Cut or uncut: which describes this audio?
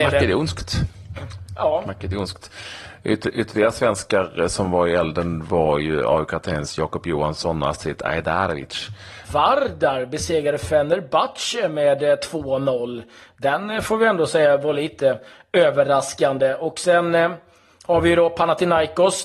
cut